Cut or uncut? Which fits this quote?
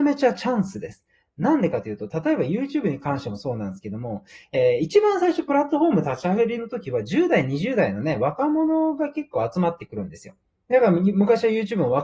uncut